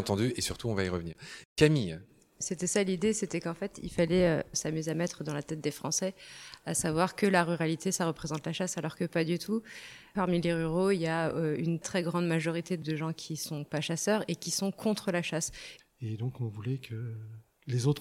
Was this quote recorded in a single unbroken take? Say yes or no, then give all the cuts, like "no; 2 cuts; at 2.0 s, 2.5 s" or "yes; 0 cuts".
no; 3 cuts; at 4.5 s, 11.8 s, 15.8 s